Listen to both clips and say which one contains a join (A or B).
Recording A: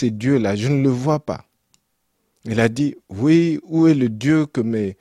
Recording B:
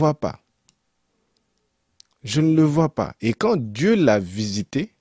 A